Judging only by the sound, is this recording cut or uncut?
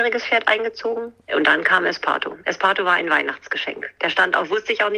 uncut